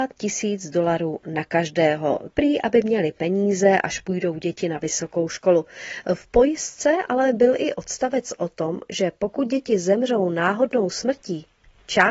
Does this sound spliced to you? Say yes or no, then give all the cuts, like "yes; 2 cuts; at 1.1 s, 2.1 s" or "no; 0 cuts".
yes; 1 cut; at 2.3 s